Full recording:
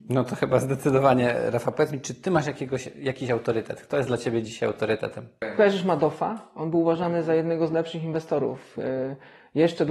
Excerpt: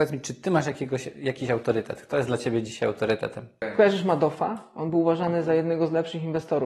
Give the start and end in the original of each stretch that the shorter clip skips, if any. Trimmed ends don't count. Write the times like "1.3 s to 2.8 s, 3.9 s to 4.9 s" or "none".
none